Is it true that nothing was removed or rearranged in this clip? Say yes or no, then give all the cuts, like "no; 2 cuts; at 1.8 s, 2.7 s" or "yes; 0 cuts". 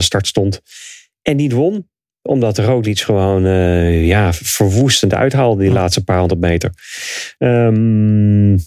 no; 1 cut; at 7.4 s